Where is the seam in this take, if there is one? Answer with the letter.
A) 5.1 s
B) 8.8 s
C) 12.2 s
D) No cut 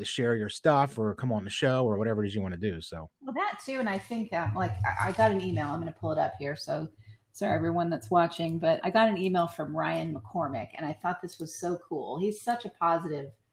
B